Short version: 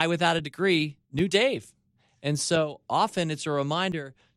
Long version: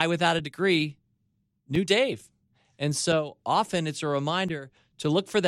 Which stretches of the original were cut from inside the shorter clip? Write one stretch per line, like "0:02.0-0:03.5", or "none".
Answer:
0:01.0-0:01.6